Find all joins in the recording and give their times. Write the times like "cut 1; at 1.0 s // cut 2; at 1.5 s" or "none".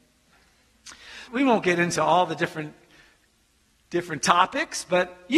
cut 1; at 1.3 s